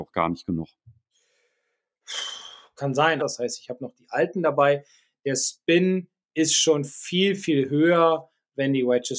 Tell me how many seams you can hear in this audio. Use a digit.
1